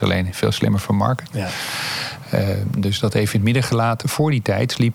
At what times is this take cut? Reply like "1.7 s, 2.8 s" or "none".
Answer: 4.0 s